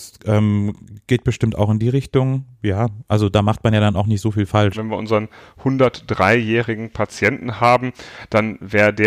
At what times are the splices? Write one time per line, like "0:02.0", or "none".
0:04.7